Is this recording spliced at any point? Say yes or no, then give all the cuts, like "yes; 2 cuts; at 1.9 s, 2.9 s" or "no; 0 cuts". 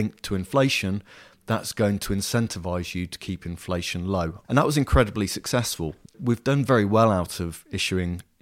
yes; 1 cut; at 4.4 s